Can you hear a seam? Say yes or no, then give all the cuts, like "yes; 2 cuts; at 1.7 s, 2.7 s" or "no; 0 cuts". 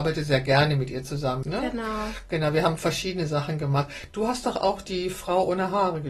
yes; 1 cut; at 1.4 s